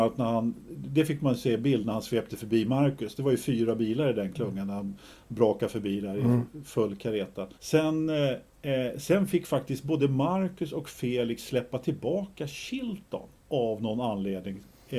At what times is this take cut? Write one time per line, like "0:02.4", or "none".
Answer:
0:07.5
0:13.4